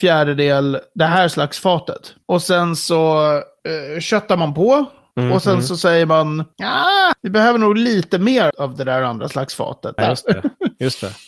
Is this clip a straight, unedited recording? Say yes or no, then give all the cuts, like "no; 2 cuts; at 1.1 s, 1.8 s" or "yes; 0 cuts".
no; 3 cuts; at 7.1 s, 8.5 s, 10.0 s